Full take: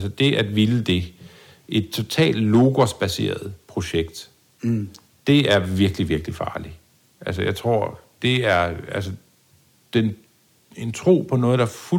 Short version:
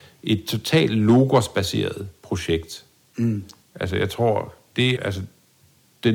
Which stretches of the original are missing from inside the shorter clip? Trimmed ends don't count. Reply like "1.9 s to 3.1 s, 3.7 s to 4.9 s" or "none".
5.1 s to 7.1 s, 8.4 s to 8.9 s